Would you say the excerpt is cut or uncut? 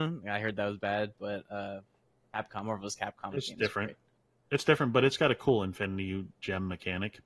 uncut